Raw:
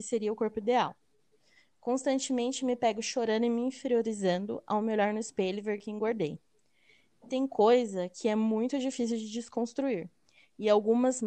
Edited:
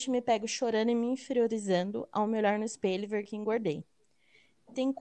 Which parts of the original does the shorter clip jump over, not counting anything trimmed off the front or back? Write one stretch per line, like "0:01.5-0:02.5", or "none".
none